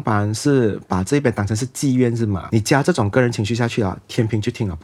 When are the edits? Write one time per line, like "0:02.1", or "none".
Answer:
0:02.5

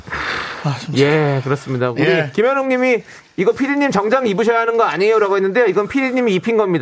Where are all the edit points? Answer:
none

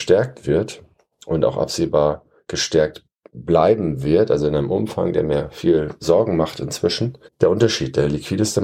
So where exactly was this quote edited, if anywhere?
0:07.3

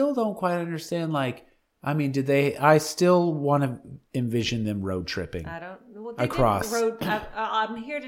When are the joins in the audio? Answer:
none

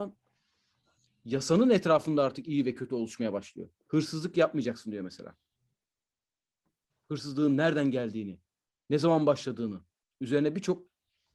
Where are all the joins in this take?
0:06.9

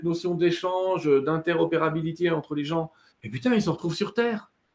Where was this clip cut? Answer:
0:03.1

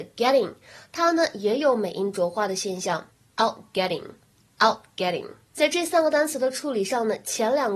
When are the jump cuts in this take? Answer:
0:05.5

